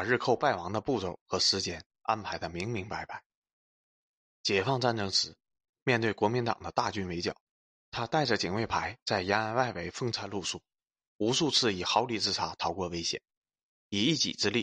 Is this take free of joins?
yes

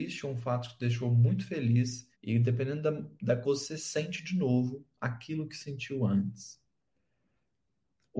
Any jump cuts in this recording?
yes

